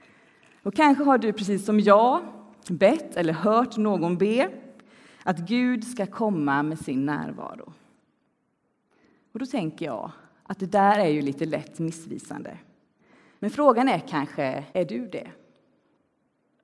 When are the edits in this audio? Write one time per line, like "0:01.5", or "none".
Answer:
0:13.4
0:14.7